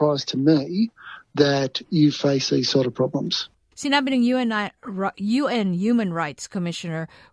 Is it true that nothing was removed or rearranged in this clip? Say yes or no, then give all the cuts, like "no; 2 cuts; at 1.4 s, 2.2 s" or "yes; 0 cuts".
no; 1 cut; at 3.7 s